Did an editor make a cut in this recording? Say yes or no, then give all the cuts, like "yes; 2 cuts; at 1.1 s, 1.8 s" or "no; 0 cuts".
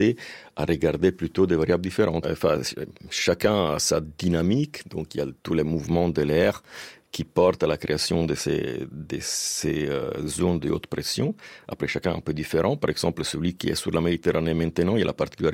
yes; 1 cut; at 2.2 s